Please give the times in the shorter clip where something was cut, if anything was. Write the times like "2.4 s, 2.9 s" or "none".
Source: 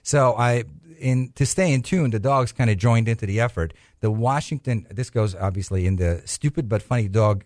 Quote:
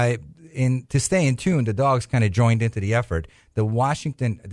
none